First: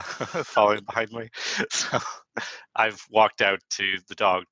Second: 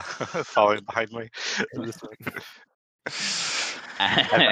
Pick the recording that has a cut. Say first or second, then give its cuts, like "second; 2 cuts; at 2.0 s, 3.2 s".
second; 1 cut; at 1.7 s